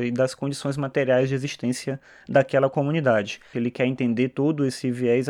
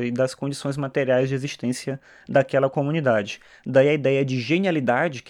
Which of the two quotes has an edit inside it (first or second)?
first